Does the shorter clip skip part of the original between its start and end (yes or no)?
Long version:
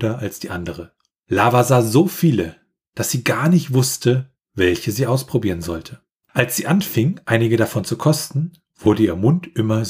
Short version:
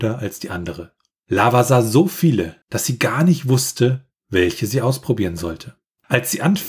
yes